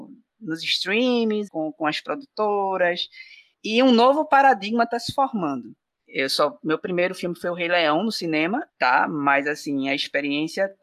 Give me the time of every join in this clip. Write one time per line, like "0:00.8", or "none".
0:01.5
0:06.0
0:08.7